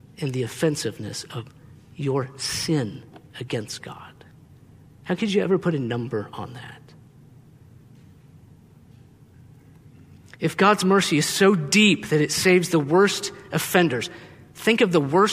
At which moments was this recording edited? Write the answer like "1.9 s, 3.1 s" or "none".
none